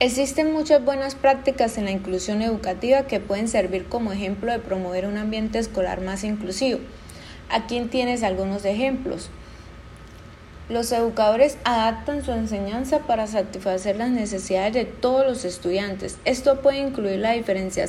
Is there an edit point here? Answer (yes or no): no